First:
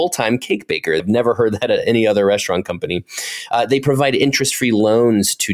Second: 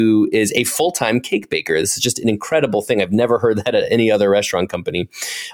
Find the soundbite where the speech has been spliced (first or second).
first